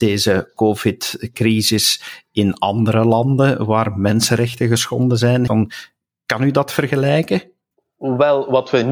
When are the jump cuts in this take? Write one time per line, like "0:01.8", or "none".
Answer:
0:05.5